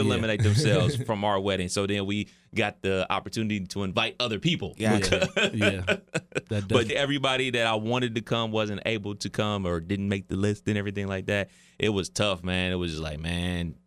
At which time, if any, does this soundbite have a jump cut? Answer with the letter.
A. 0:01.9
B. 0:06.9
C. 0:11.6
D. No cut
B